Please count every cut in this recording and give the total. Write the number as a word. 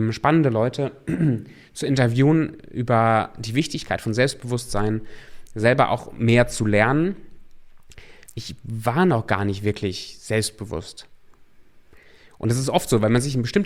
one